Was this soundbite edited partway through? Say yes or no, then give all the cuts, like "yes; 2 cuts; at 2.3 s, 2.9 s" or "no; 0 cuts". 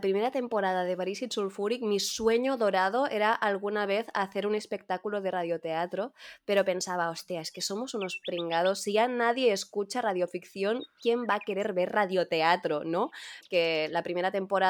yes; 1 cut; at 13.4 s